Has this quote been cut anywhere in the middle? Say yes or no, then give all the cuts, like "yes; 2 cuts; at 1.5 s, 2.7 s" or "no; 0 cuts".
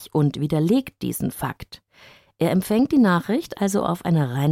no; 0 cuts